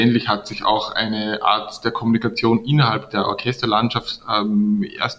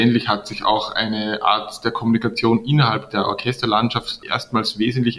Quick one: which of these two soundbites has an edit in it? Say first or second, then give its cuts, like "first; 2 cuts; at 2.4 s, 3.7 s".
second; 1 cut; at 4.2 s